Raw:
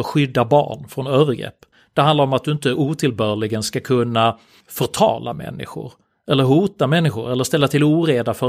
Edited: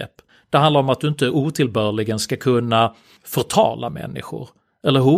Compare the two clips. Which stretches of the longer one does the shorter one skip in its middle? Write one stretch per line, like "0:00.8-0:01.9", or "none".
none